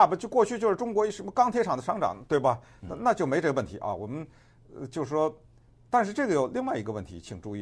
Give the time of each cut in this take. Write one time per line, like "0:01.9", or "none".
none